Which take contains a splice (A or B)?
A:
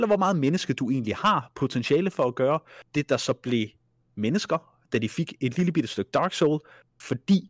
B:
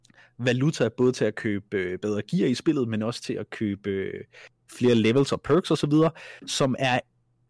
A